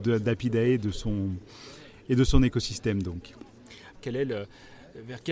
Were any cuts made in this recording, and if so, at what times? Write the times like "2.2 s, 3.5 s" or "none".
3.9 s